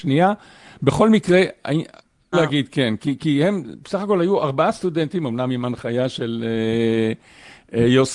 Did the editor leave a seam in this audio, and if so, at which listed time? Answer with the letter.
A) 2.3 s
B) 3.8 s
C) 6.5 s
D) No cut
A